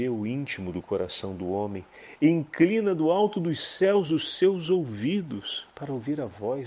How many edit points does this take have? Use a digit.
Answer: 0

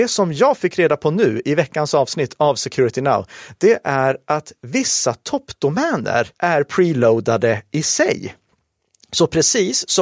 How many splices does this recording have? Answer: 1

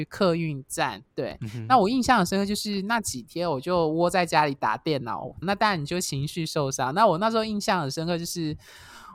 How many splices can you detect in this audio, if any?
2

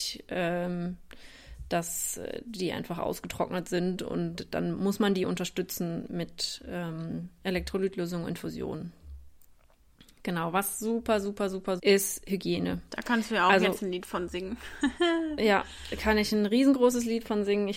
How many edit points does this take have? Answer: 1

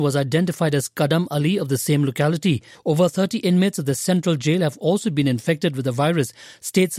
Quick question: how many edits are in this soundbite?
1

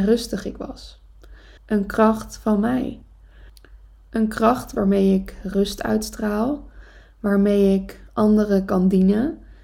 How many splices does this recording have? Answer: 1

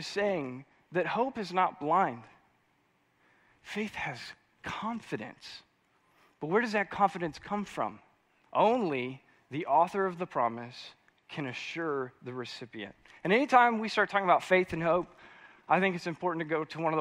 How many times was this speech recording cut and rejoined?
1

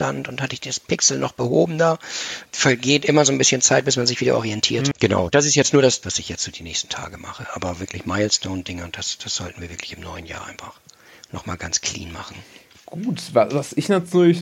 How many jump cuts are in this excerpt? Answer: 2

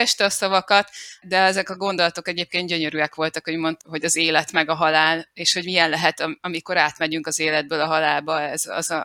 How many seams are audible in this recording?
2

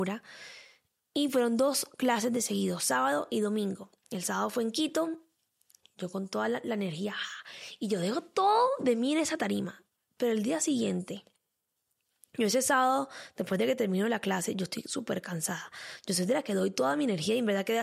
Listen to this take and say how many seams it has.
0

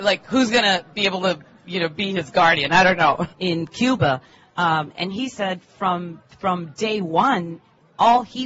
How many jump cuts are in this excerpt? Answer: 1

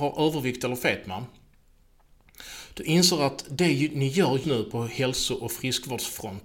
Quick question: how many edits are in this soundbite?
1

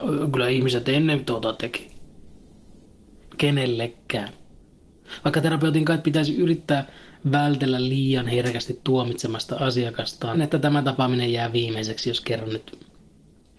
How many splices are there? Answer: 2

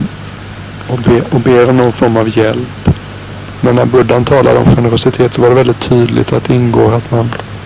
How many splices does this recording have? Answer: 1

